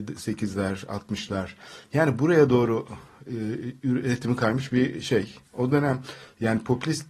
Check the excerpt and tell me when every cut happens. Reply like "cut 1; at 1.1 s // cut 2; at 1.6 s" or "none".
none